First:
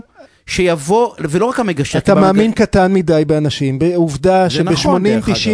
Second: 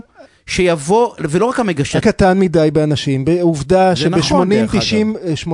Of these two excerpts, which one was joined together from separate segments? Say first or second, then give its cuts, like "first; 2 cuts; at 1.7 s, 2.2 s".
second; 1 cut; at 2.0 s